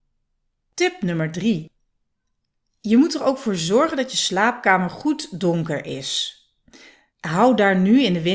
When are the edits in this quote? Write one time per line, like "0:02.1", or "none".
0:07.1